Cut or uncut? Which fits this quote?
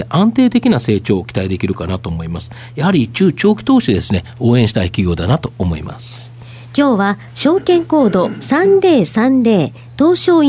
uncut